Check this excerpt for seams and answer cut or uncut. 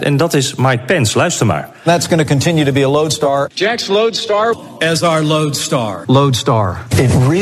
uncut